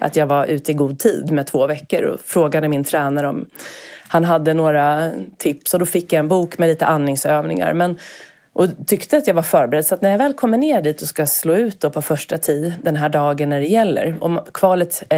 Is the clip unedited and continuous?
yes; 0 cuts

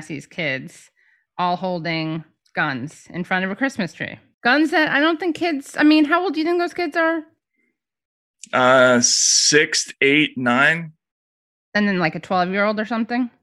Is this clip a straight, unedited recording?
yes; 0 cuts

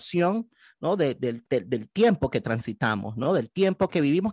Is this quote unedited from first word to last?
yes; 0 cuts

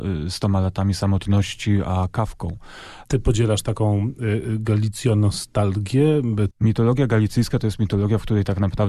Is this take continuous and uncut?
no; 2 cuts; at 3.0 s, 6.5 s

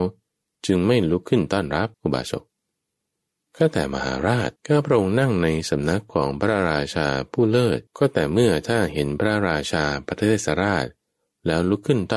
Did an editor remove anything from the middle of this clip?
yes; 3 cuts; at 1.9 s, 4.6 s, 7.9 s

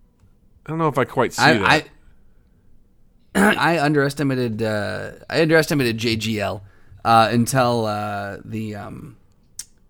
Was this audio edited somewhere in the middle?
yes; 1 cut; at 3.6 s

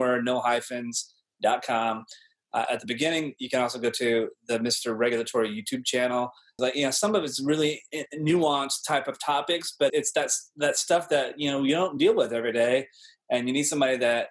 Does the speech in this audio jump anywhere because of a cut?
yes; 3 cuts; at 2.7 s, 6.6 s, 9.9 s

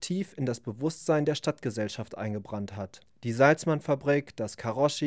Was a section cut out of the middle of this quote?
yes; 1 cut; at 3.1 s

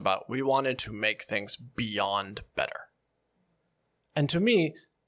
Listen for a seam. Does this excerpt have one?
no; 0 cuts

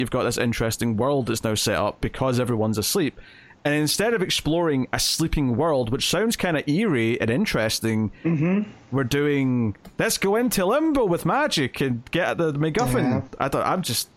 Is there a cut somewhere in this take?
no; 0 cuts

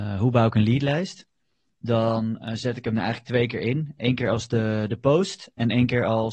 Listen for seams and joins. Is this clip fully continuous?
yes; 0 cuts

